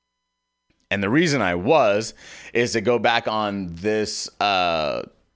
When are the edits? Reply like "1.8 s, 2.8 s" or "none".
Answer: none